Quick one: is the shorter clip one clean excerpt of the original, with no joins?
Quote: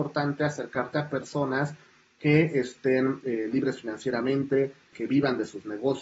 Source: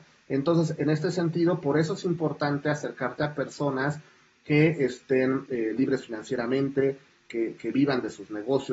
no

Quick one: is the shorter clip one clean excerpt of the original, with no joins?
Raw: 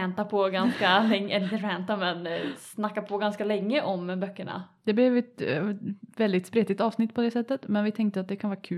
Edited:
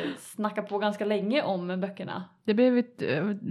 yes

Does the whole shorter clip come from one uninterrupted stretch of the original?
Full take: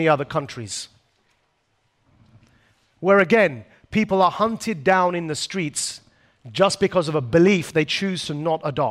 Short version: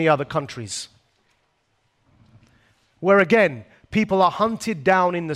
yes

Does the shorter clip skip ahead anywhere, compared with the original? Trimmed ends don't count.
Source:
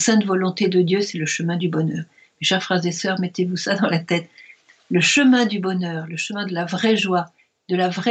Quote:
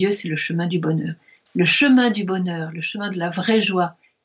yes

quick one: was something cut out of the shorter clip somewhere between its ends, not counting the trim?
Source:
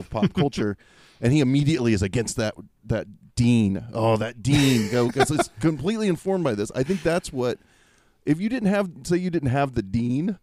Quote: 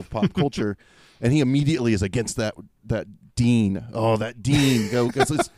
no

